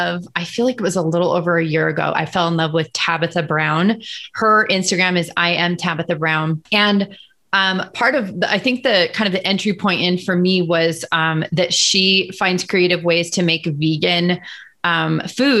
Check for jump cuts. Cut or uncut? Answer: uncut